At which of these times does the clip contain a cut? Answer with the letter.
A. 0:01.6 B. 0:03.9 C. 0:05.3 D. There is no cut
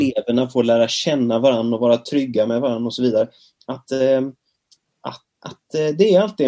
C